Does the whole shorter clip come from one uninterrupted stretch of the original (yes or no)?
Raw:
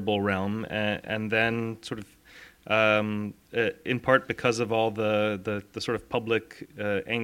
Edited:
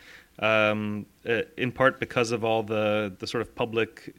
no